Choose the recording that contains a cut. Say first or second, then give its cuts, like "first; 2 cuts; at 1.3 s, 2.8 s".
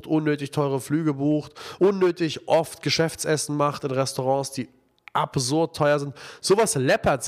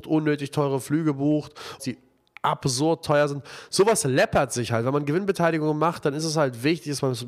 second; 1 cut; at 1.8 s